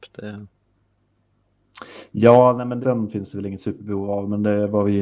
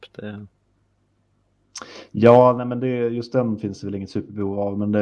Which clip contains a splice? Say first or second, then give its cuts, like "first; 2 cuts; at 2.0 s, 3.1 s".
first; 1 cut; at 2.8 s